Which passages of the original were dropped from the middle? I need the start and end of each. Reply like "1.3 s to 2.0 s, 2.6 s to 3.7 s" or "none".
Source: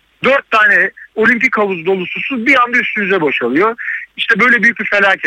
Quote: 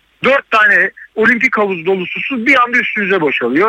none

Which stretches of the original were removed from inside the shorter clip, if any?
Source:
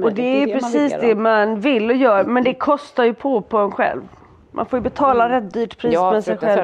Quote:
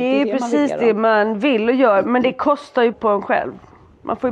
3.1 s to 3.4 s

